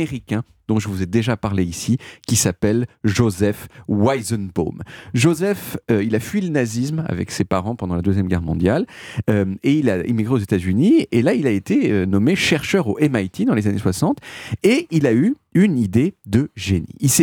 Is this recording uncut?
yes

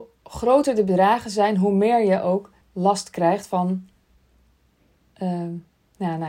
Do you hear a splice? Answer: yes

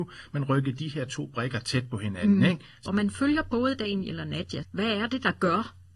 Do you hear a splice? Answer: yes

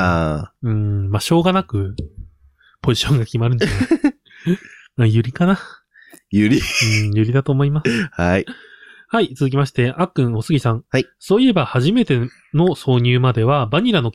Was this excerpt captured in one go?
yes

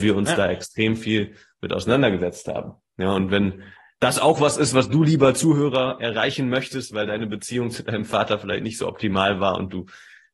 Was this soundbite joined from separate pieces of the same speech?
no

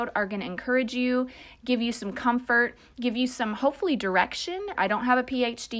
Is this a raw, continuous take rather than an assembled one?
no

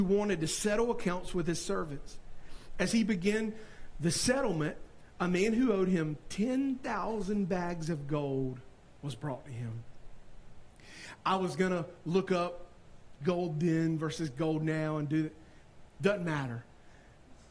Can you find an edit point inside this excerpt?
no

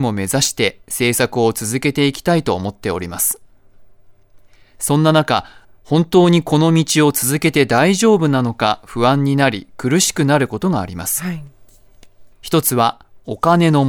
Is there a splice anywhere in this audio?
yes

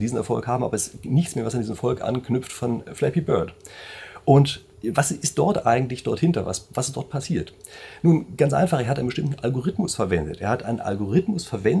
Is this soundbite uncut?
yes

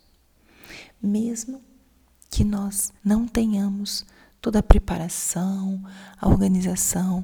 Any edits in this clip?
yes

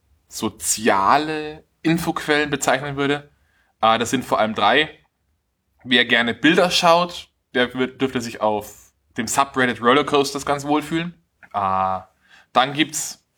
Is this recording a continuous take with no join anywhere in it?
no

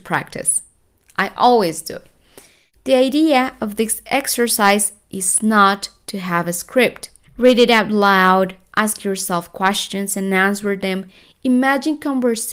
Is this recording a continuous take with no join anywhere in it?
no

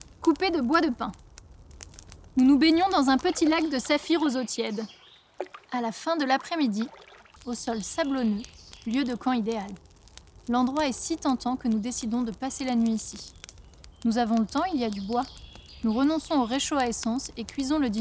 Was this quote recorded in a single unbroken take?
no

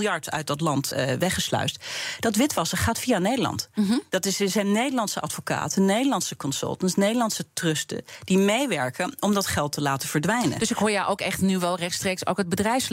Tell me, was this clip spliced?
no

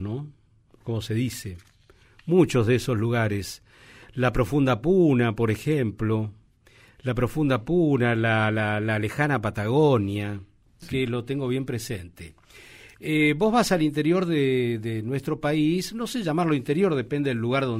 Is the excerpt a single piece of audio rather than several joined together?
no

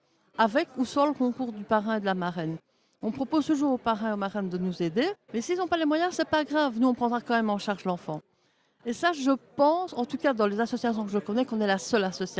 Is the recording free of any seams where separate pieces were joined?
no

